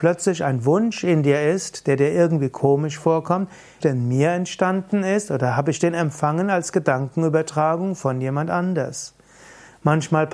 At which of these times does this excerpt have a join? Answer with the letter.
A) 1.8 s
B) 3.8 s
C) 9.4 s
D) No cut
B